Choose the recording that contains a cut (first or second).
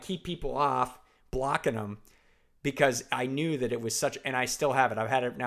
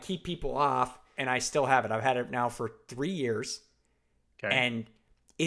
second